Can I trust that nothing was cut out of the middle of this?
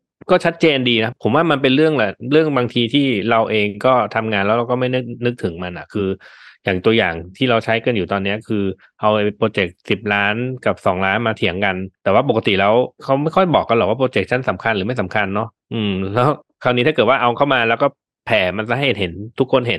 yes; 0 cuts

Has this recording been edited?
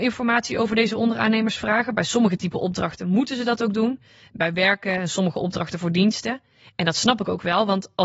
no; 0 cuts

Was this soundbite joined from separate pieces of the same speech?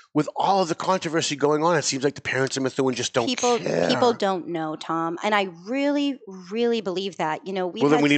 no; 0 cuts

